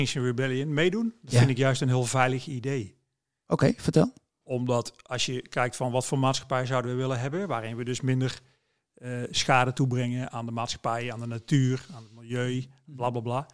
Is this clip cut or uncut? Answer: uncut